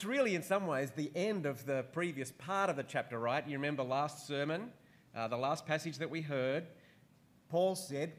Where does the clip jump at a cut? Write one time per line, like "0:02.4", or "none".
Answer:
none